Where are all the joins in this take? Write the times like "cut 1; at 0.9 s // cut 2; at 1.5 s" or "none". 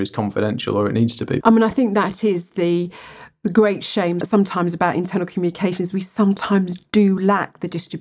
cut 1; at 1.4 s // cut 2; at 4.2 s